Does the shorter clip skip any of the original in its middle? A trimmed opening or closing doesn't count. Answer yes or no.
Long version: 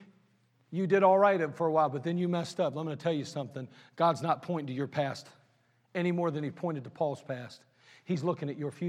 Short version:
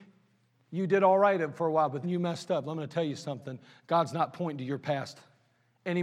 yes